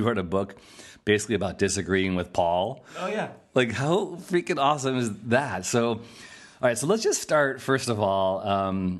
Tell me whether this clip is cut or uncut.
uncut